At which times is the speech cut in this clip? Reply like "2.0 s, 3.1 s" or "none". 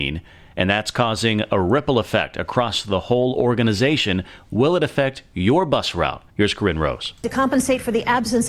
6.3 s

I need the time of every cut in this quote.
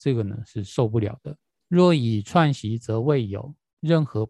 1.6 s

